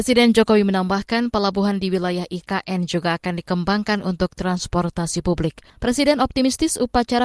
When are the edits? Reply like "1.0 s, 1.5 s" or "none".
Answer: 5.7 s